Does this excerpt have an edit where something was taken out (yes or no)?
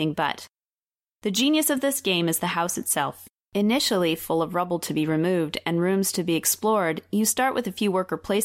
no